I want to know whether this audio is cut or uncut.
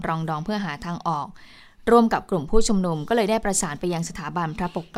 uncut